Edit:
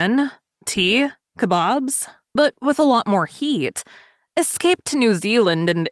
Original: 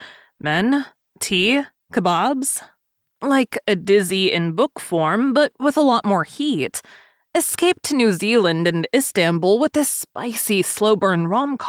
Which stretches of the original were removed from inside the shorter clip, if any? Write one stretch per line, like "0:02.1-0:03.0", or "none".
0:02.9-0:05.3